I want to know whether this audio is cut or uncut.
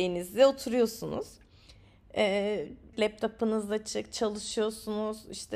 cut